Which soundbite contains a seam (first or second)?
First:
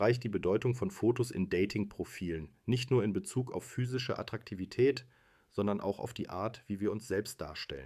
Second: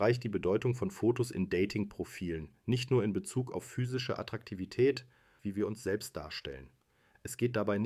second